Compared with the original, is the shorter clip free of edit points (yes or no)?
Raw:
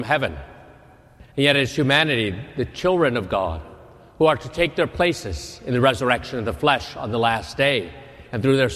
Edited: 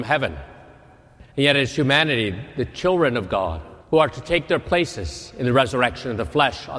no